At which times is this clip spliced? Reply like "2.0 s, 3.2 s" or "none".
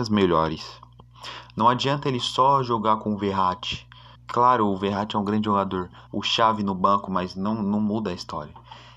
4.2 s, 6.1 s